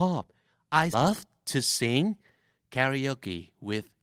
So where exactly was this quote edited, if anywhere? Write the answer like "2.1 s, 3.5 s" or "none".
0.9 s